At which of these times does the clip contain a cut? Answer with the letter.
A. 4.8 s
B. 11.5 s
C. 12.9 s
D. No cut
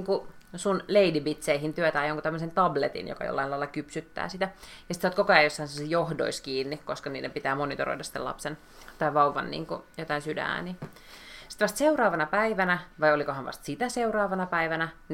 C